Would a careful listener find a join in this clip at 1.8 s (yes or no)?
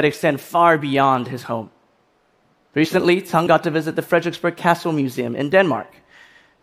no